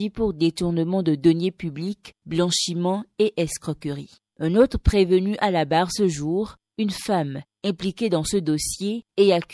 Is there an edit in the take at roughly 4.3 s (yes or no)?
yes